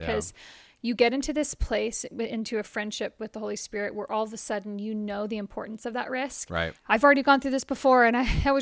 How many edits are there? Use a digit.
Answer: 1